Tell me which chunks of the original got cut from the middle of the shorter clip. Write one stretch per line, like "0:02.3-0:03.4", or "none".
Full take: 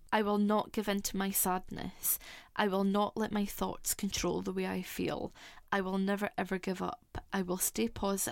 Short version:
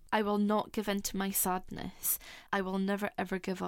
0:02.5-0:05.7